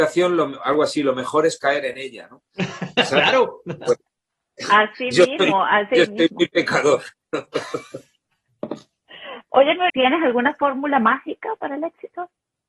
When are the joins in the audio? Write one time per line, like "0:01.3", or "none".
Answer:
0:09.9